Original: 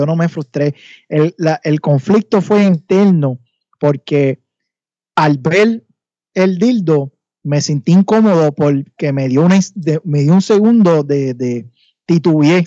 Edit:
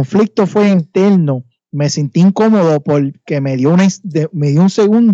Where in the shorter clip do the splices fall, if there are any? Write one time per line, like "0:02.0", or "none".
0:01.6